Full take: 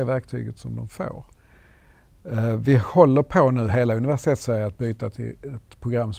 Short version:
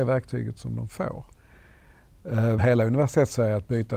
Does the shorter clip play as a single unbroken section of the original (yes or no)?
no